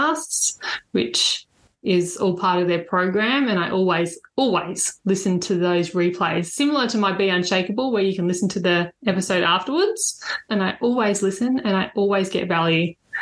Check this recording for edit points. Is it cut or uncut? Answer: cut